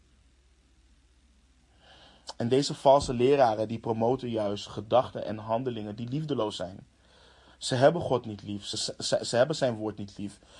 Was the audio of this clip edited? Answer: no; 0 cuts

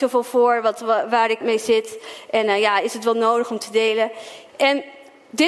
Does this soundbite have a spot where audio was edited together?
yes; 2 cuts; at 1.4 s, 4.5 s

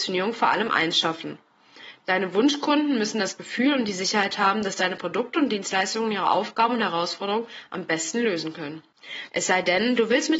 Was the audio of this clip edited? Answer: yes; 1 cut; at 9.3 s

